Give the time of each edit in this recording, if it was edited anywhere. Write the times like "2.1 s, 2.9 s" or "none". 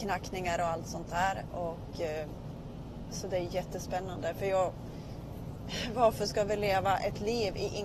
none